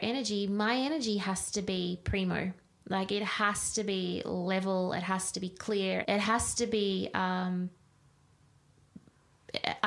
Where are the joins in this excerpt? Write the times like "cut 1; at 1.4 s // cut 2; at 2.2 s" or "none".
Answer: cut 1; at 6.0 s